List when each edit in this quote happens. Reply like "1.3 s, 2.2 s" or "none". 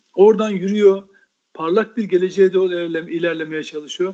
none